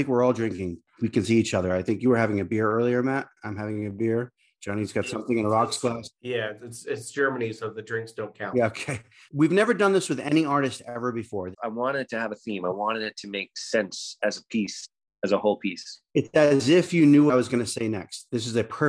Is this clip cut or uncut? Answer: cut